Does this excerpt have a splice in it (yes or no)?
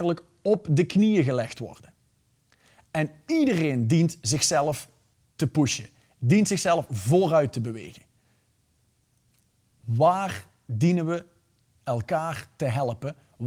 no